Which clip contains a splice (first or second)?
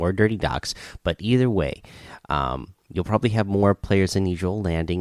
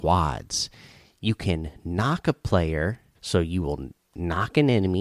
second